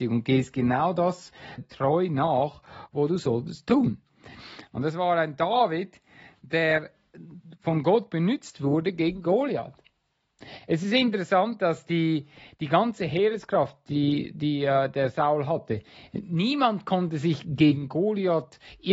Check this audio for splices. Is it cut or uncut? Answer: cut